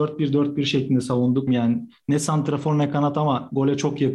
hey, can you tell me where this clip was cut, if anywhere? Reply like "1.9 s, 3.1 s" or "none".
1.5 s